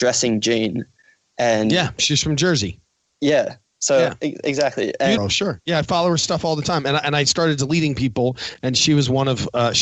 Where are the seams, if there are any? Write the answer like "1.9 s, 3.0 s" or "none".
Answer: 5.2 s